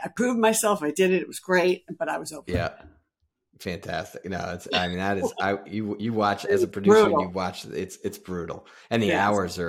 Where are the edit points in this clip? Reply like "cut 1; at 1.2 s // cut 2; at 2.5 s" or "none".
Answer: none